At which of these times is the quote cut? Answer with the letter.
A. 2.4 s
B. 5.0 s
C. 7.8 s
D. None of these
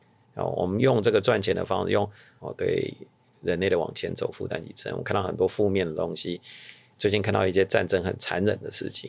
A